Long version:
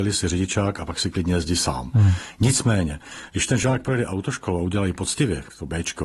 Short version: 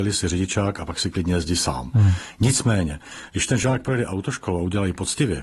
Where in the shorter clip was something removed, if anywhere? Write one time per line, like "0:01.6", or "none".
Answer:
none